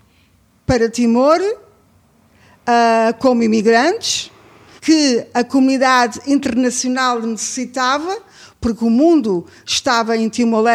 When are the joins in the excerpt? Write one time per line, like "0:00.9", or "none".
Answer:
0:04.8